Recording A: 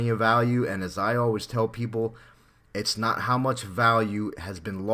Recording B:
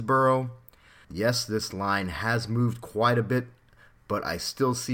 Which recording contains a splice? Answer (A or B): B